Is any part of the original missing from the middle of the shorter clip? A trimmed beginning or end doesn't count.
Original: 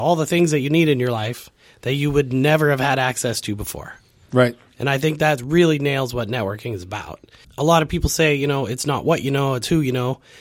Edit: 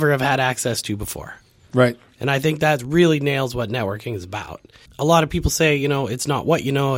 no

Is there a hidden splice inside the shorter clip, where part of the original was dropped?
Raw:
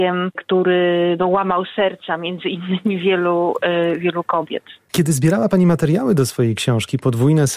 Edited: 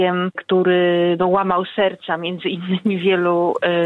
no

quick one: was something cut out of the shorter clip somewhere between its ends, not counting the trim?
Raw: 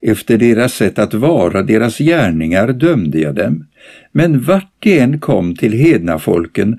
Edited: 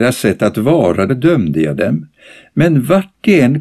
yes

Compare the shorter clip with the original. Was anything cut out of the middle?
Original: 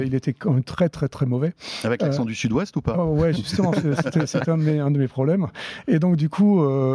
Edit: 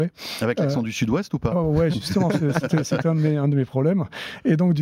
no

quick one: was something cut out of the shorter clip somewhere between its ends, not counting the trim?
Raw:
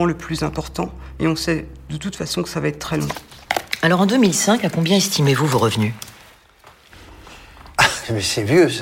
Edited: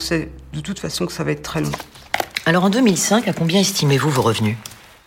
no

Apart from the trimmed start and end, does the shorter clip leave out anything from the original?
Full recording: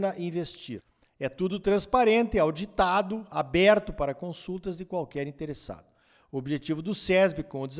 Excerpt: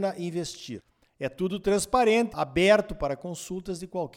yes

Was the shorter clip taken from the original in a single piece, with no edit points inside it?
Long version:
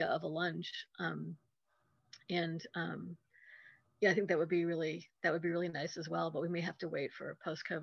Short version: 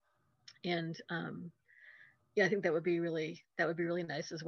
yes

